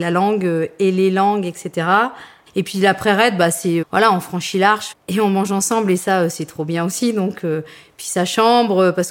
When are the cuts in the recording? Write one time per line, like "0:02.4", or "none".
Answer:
0:02.5
0:03.8
0:04.9